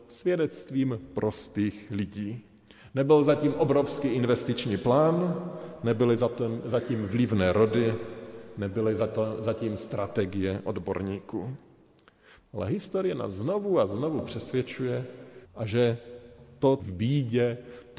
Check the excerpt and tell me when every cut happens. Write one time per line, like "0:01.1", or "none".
0:12.4
0:15.4
0:16.8

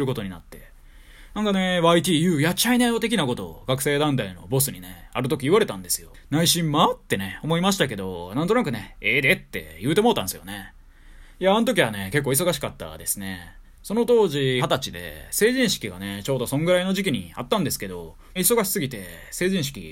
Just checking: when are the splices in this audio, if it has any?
0:14.6
0:18.4

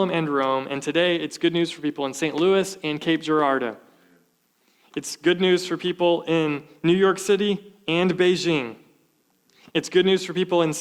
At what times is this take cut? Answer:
none

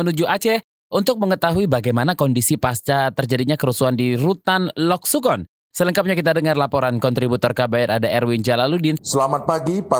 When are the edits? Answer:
0:09.0

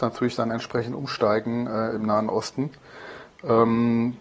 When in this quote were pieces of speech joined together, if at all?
none

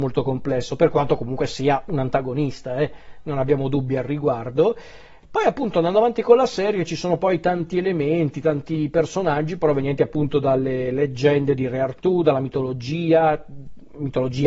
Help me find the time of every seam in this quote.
none

